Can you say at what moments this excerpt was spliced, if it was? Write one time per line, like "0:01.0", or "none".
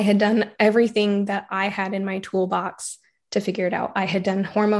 none